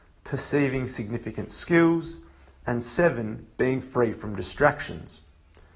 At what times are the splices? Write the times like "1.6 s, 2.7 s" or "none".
none